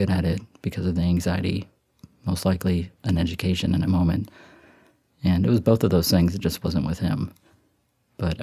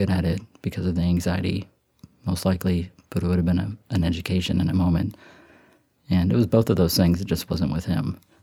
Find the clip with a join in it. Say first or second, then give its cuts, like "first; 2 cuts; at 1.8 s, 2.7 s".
first; 1 cut; at 3.0 s